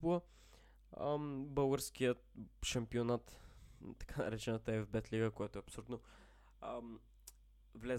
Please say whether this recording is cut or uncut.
uncut